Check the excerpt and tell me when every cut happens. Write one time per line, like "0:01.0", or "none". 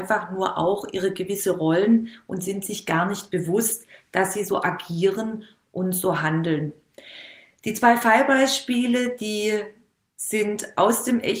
none